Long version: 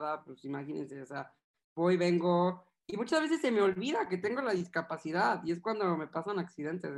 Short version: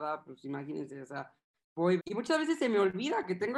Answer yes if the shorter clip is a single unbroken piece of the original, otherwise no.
no